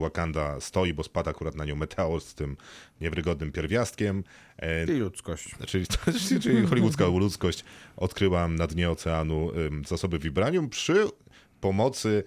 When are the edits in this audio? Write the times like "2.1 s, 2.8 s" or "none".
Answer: 4.9 s

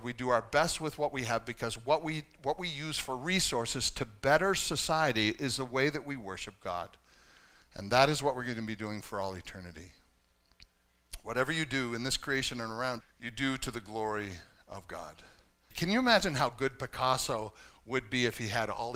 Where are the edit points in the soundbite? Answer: 13.0 s, 15.7 s

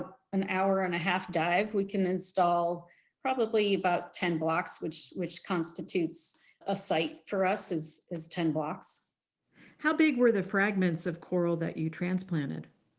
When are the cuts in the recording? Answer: none

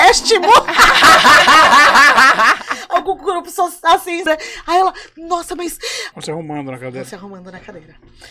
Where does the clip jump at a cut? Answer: 4.3 s, 6.1 s

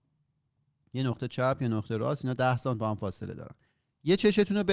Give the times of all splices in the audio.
none

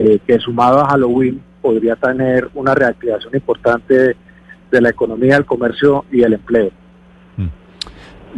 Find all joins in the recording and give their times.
none

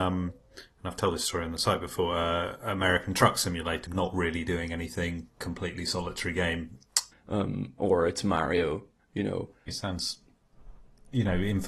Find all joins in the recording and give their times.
3.9 s, 7.1 s, 9.7 s

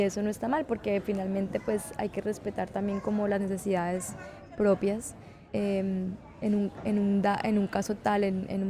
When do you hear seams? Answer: 5.5 s

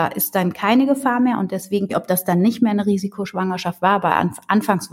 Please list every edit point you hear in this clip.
1.9 s

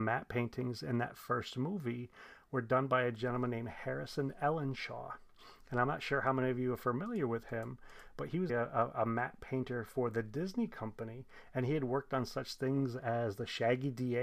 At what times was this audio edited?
8.5 s

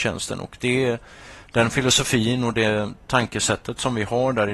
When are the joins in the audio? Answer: none

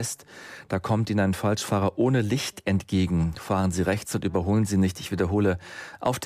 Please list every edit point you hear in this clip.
none

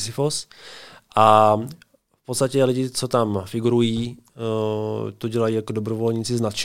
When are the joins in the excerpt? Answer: none

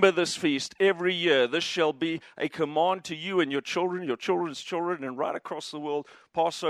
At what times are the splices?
none

